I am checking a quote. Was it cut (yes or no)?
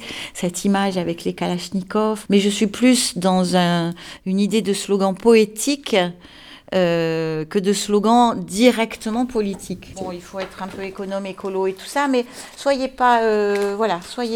yes